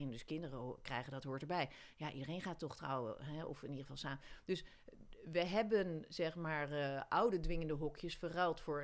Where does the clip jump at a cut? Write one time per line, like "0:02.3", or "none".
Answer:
none

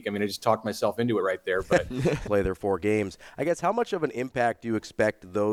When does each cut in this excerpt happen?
0:02.3

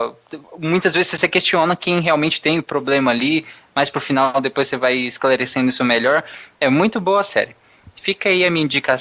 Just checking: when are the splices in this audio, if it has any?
none

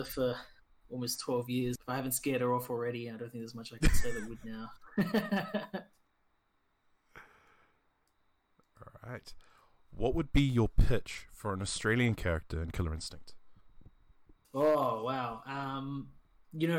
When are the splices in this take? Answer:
0:01.8

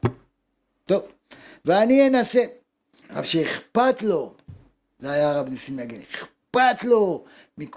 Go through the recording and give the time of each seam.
0:03.0

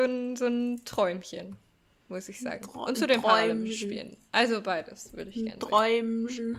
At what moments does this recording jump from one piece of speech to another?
none

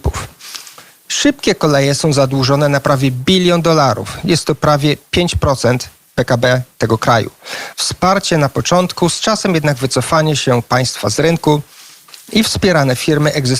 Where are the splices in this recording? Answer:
0:07.7

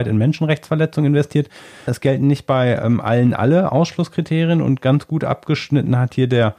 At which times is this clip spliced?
0:01.9

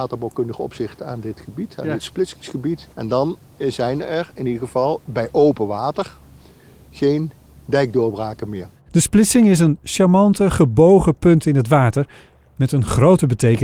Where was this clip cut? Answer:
0:02.9

